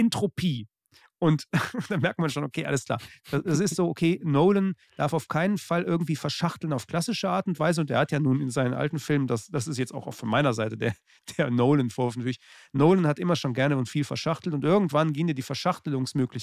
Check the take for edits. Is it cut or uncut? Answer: uncut